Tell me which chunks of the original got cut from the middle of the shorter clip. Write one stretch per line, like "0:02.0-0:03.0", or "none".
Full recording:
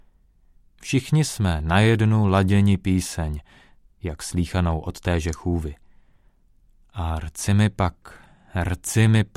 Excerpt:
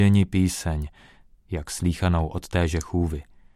none